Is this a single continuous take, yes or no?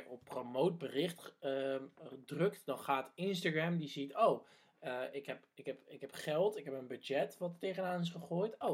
yes